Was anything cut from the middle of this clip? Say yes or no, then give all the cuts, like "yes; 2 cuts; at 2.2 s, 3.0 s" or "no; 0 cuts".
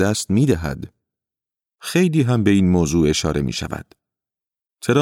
no; 0 cuts